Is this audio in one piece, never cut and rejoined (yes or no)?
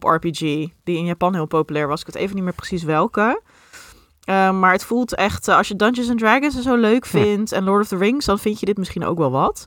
yes